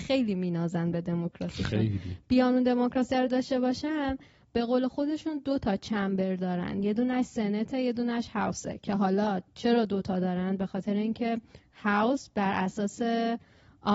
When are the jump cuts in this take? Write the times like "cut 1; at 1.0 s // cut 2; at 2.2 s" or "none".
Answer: none

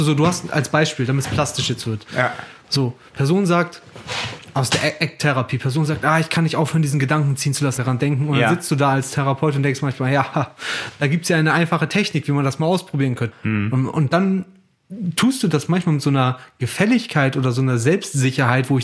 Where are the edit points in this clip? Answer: cut 1; at 7.8 s // cut 2; at 13.3 s

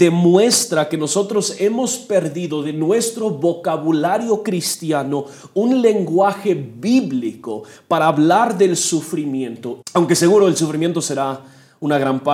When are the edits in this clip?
cut 1; at 9.8 s

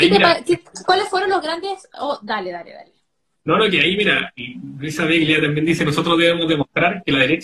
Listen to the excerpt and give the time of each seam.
none

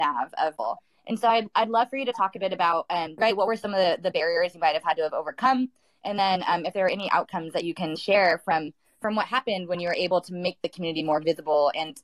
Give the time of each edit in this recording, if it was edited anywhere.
cut 1; at 3.2 s

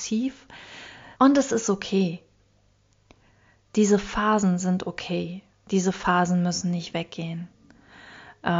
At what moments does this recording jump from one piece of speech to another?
cut 1; at 1.2 s

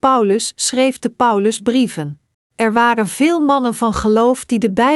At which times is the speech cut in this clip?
cut 1; at 2.3 s

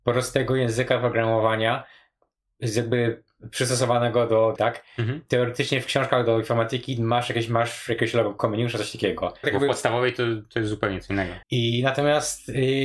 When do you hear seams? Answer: cut 1; at 4.6 s // cut 2; at 9.4 s // cut 3; at 11.4 s

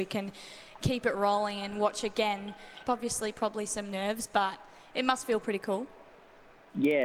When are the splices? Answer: cut 1; at 2.8 s

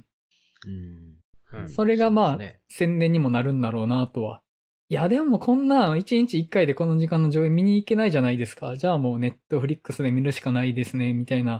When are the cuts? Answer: cut 1; at 1.3 s

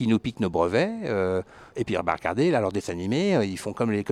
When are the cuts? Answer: cut 1; at 1.7 s

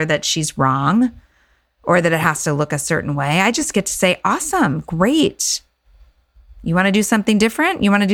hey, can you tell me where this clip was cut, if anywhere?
none

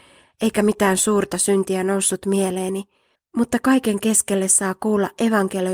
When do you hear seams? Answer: cut 1; at 3.2 s

